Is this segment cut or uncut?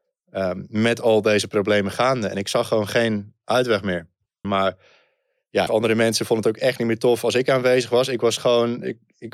cut